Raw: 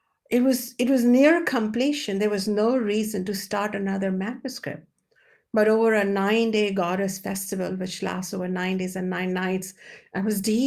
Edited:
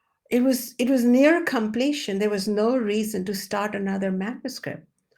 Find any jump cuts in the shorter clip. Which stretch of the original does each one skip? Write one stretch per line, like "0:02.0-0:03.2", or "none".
none